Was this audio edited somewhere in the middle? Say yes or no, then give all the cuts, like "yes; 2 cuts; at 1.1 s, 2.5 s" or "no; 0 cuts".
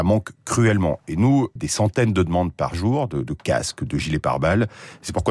yes; 2 cuts; at 1.6 s, 3.2 s